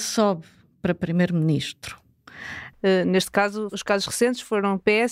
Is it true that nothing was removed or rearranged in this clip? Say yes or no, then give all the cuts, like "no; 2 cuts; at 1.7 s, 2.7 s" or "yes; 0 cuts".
no; 1 cut; at 2.7 s